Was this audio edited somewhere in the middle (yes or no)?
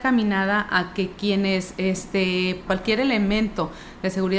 yes